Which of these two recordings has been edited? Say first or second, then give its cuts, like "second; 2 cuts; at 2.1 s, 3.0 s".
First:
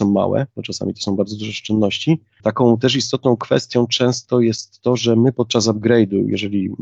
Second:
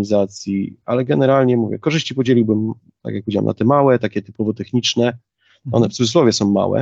first; 1 cut; at 2.4 s